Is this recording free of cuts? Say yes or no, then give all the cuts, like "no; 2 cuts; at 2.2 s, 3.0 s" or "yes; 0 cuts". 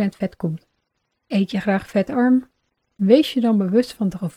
yes; 0 cuts